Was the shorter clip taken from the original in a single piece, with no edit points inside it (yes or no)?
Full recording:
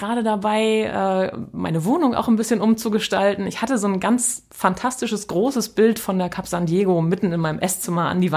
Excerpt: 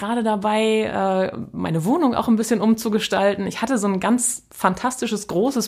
yes